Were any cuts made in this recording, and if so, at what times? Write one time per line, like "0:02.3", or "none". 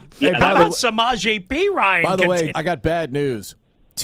0:02.5